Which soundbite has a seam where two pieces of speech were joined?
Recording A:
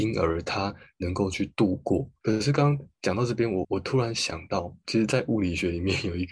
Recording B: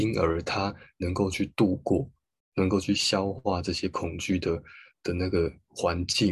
A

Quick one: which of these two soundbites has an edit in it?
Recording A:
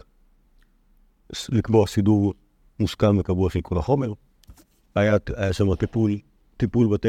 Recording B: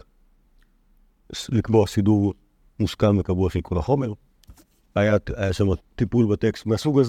B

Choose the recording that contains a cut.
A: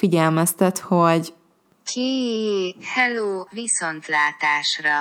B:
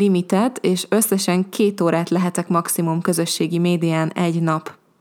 A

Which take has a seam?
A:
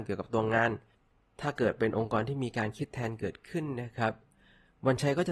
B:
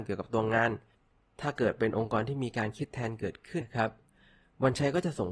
B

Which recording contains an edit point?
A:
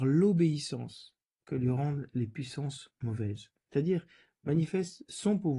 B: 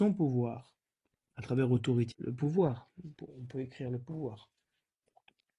B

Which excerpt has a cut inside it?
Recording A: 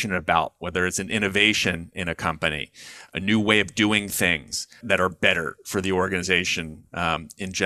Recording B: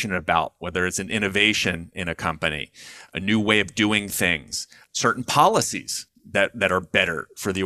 A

